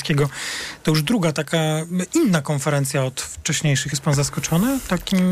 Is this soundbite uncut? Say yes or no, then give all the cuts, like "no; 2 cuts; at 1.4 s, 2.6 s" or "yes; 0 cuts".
yes; 0 cuts